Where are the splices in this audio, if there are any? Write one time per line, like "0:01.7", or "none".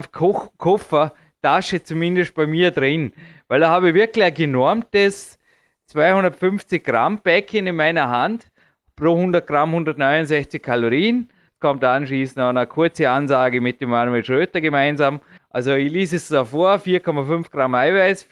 0:11.5
0:15.4

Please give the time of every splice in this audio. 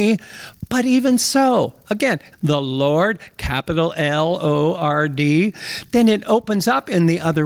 0:02.3

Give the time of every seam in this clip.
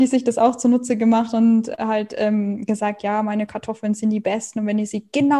none

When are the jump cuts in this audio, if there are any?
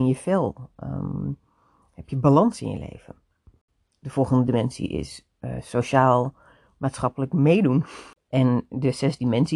0:08.2

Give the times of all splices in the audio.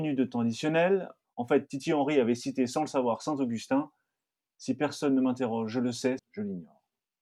0:01.2
0:04.5
0:06.2

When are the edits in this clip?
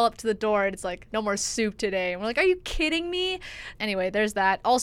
0:01.1
0:03.7

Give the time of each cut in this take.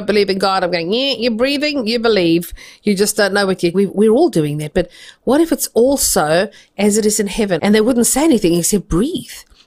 0:03.7
0:07.6

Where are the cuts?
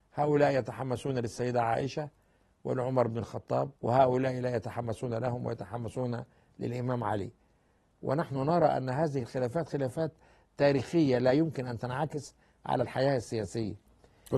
0:03.8

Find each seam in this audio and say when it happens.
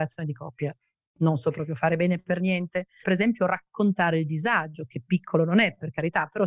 0:03.0

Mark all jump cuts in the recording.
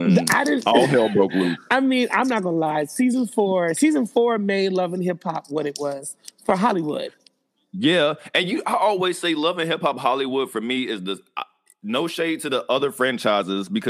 none

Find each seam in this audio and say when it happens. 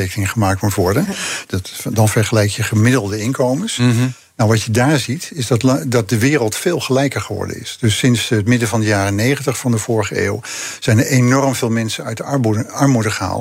0:01.4

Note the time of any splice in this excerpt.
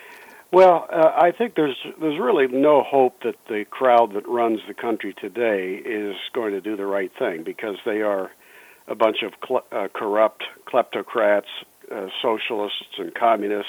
none

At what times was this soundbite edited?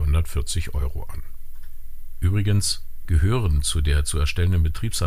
0:03.1

